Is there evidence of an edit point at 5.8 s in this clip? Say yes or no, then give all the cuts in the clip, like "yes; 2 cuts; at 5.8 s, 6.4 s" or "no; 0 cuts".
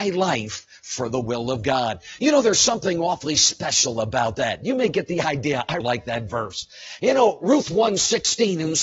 yes; 1 cut; at 5.8 s